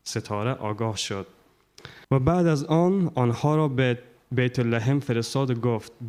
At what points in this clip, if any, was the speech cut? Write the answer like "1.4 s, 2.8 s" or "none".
2.0 s